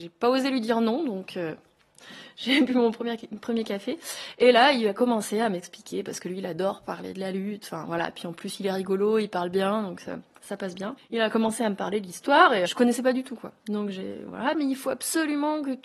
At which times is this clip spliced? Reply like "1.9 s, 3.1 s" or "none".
12.7 s, 14.5 s

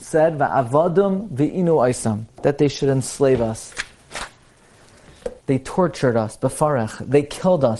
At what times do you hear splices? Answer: 5.4 s

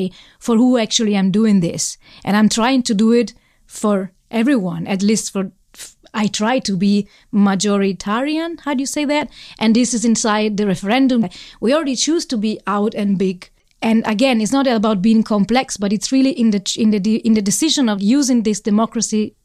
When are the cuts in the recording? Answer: 11.2 s, 18.0 s

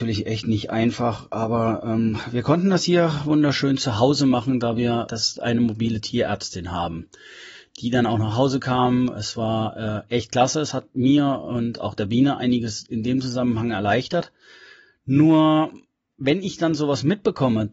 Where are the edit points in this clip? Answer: 5.1 s

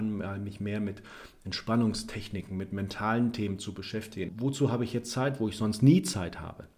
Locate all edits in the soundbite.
2.5 s, 4.3 s

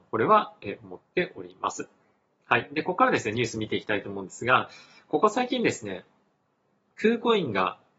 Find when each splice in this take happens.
none

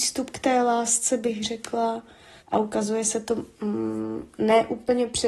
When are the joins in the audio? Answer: 2.4 s, 3.5 s

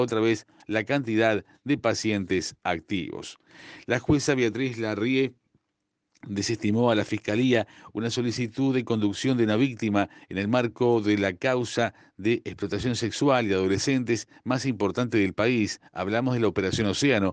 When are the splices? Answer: none

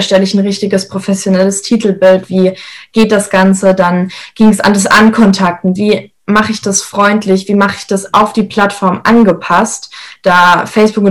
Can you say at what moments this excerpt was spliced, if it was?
none

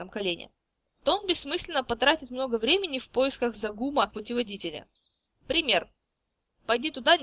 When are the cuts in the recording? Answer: 0.9 s, 5.2 s

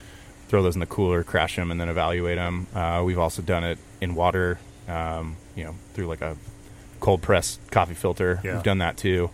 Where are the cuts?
none

